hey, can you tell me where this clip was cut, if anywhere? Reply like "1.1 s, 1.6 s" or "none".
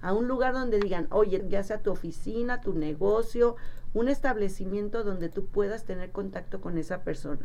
1.4 s

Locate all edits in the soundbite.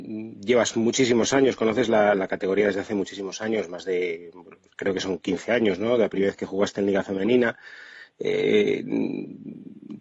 none

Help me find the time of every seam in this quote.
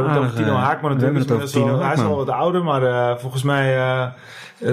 none

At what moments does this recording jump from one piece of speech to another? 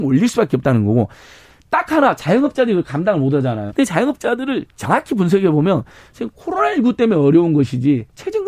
3.7 s

